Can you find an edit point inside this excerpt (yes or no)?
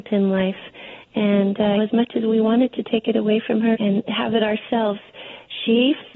yes